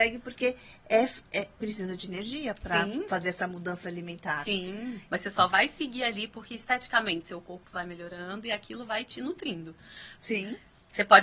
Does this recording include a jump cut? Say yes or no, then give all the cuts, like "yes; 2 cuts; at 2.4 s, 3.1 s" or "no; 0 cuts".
yes; 2 cuts; at 5.0 s, 10.1 s